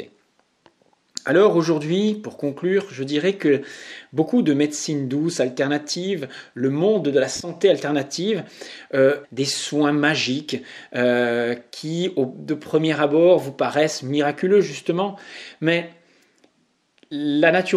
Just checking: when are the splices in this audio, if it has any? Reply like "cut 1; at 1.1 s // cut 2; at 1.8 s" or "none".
cut 1; at 9.2 s

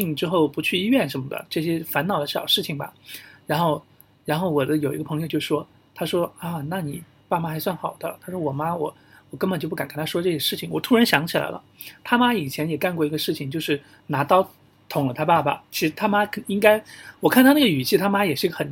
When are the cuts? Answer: cut 1; at 15.7 s

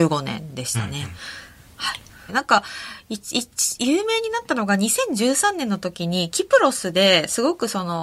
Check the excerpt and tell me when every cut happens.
cut 1; at 2.3 s

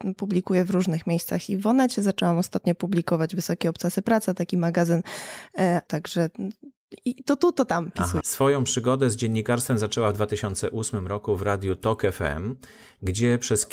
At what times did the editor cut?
cut 1; at 5.9 s // cut 2; at 8.2 s

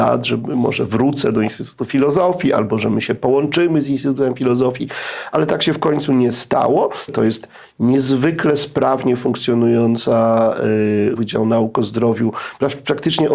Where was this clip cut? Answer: cut 1; at 7.1 s // cut 2; at 11.1 s

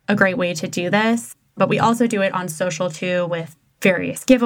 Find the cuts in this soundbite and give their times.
none

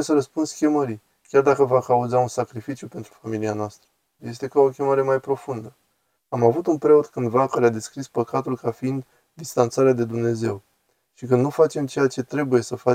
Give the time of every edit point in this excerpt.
cut 1; at 4.2 s // cut 2; at 6.2 s

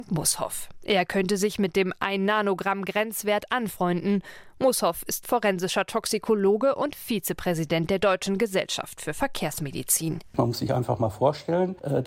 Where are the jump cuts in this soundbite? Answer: none

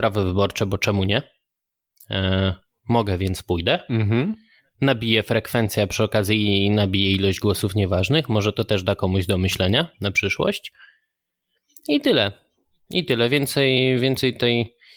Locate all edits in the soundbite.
none

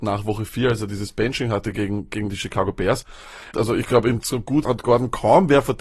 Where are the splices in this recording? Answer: cut 1; at 3.5 s // cut 2; at 4.6 s

